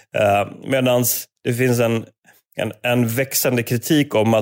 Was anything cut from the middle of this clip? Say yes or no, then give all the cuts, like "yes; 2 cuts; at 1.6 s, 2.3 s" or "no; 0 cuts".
no; 0 cuts